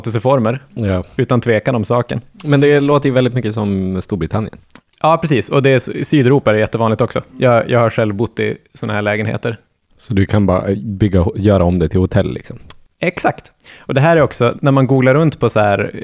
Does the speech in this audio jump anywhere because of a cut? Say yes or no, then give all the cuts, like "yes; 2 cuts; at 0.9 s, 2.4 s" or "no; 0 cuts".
yes; 2 cuts; at 9.9 s, 14.5 s